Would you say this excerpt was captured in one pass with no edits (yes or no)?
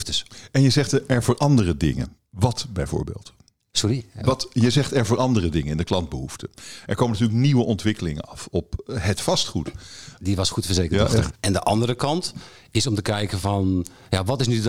no